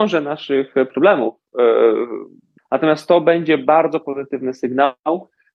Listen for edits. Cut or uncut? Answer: cut